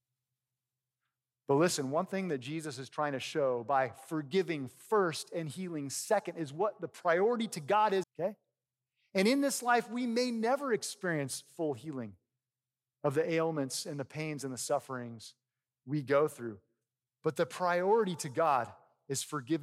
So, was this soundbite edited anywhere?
yes; 1 cut; at 8.0 s

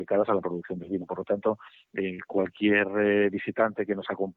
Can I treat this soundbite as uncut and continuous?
yes; 0 cuts

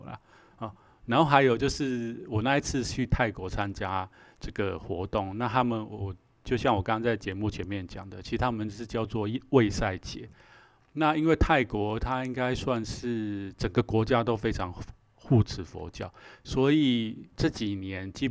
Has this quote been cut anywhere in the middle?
no; 0 cuts

